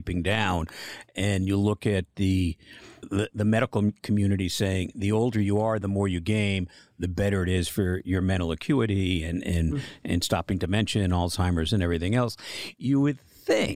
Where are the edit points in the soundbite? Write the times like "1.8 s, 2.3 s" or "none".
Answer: none